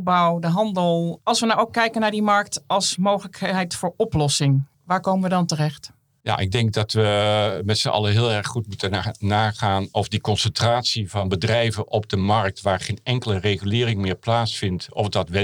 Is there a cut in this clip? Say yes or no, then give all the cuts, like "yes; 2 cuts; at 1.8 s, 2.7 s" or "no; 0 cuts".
yes; 1 cut; at 4.7 s